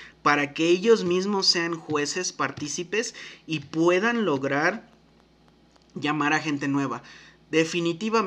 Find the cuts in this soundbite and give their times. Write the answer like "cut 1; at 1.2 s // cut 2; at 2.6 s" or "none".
none